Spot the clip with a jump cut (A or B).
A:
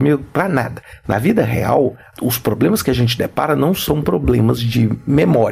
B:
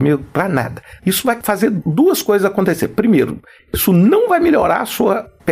B